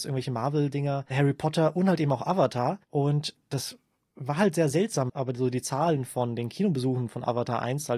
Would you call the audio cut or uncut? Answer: cut